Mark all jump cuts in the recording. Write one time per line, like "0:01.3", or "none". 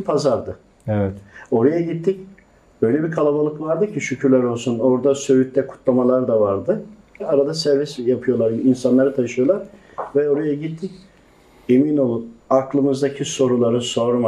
0:07.2
0:12.4